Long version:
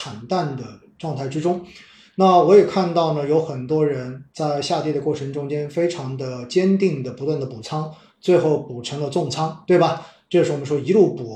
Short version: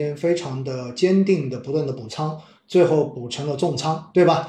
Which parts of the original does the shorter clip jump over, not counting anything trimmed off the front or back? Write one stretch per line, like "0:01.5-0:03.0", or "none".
none